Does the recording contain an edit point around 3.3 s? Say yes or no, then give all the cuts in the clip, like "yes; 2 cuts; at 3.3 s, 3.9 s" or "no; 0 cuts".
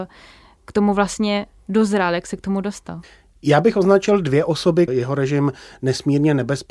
no; 1 cut; at 4.9 s